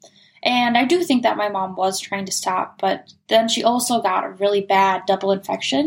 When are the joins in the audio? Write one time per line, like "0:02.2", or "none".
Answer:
none